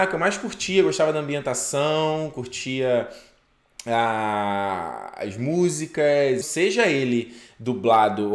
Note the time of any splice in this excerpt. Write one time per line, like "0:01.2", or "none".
0:06.4